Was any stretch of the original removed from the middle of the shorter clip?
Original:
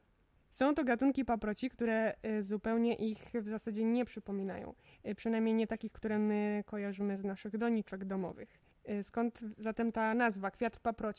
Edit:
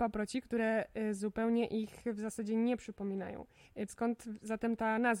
yes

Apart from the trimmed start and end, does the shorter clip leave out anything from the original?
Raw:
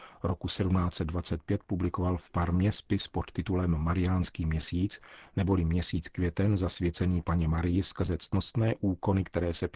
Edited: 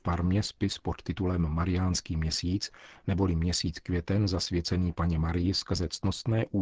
no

